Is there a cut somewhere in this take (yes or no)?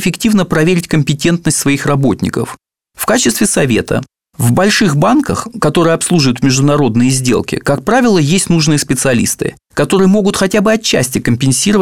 no